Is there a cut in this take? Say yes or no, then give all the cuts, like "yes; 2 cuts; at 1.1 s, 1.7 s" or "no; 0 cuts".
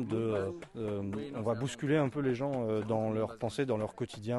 no; 0 cuts